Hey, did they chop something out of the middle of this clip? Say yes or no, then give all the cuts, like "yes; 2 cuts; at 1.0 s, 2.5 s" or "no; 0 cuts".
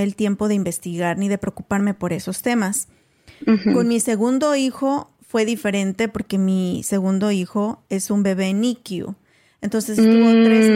no; 0 cuts